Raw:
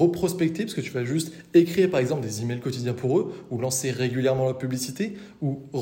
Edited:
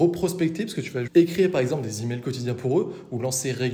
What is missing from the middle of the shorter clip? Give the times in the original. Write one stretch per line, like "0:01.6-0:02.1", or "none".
0:01.1-0:01.5